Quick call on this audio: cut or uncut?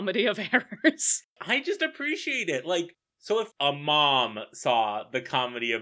uncut